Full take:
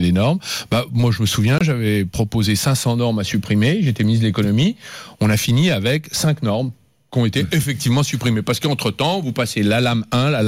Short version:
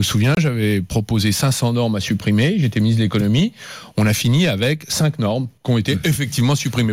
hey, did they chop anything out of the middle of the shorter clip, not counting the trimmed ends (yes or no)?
yes